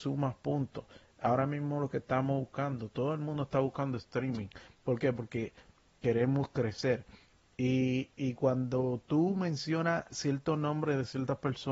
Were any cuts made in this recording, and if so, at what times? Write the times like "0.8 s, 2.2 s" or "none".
4.7 s